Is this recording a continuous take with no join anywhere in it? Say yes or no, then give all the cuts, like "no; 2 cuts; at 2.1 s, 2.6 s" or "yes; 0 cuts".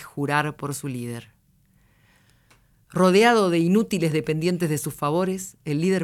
yes; 0 cuts